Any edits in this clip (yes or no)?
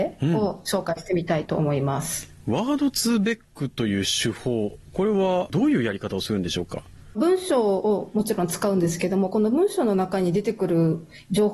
no